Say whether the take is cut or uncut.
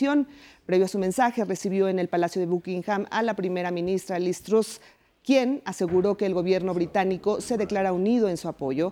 uncut